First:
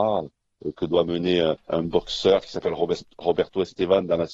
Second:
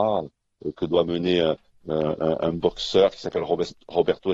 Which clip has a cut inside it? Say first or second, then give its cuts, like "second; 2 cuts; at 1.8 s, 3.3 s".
first; 1 cut; at 1.7 s